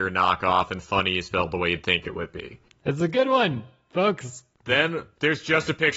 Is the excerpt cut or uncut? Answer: cut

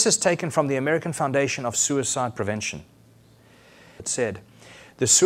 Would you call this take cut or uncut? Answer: cut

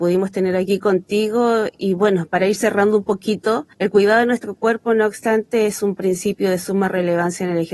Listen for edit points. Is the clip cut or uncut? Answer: cut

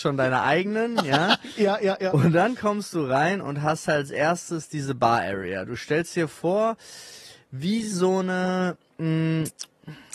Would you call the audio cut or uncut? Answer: uncut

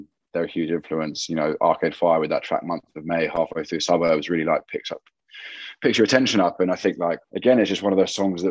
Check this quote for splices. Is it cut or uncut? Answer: cut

